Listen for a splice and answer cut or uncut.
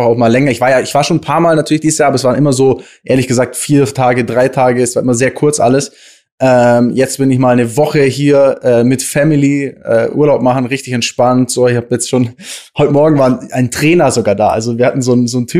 uncut